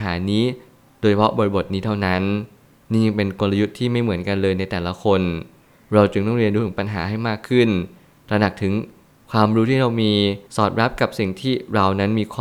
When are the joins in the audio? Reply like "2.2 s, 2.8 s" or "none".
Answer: 10.5 s